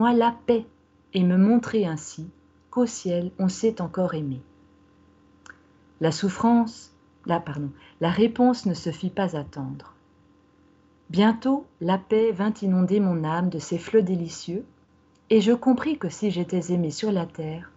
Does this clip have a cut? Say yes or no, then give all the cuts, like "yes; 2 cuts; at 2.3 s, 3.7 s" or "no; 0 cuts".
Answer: no; 0 cuts